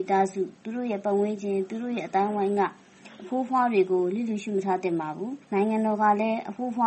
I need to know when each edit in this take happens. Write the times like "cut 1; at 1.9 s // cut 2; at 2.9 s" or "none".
cut 1; at 5.4 s